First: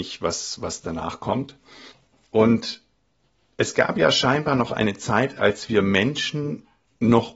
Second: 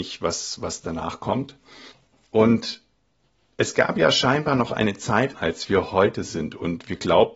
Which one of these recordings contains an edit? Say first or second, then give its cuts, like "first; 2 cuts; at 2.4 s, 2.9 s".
second; 1 cut; at 5.3 s